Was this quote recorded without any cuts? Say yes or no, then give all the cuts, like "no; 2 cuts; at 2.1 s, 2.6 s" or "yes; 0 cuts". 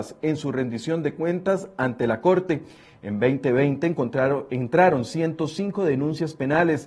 yes; 0 cuts